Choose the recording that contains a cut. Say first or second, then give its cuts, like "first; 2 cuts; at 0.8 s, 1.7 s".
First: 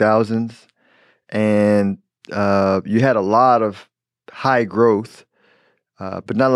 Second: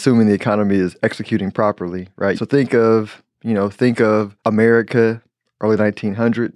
second; 2 cuts; at 2.3 s, 4.4 s